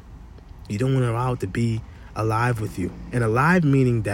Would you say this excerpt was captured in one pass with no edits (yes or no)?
yes